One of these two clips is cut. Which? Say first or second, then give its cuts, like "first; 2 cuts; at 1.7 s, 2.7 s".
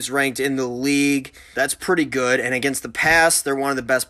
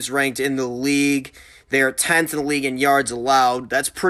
first; 1 cut; at 1.5 s